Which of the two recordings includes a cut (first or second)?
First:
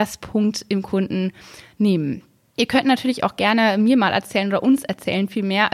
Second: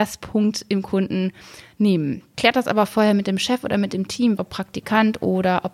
second